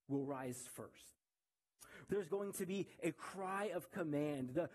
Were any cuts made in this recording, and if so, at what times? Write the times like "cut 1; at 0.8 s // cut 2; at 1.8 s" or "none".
cut 1; at 2.1 s